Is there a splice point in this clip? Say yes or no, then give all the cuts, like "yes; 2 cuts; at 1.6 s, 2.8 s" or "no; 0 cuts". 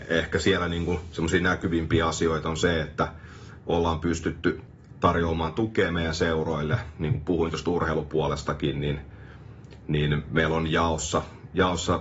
no; 0 cuts